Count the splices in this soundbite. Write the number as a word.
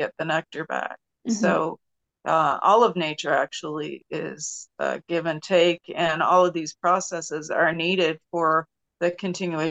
zero